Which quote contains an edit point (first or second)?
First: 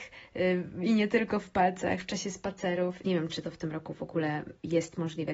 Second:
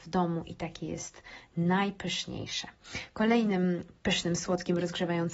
first